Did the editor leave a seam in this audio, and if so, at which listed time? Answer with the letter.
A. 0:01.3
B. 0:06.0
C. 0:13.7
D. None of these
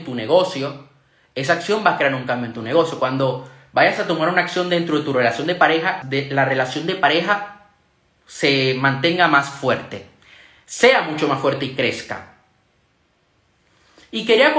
B